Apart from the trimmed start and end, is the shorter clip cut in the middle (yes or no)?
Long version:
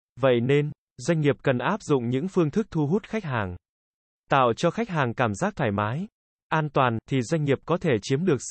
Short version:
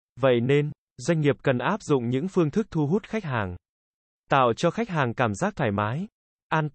no